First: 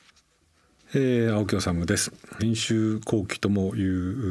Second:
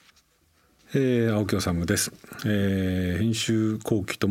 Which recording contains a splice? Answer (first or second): first